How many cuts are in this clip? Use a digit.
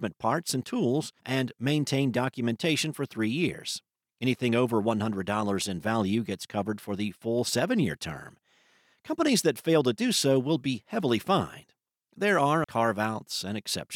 2